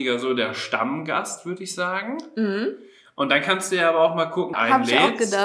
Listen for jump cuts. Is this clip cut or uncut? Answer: cut